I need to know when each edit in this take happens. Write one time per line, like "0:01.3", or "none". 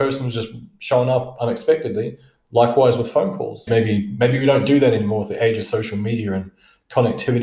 0:03.7